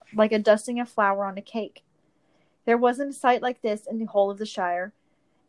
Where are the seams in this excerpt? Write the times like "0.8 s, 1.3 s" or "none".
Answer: 2.5 s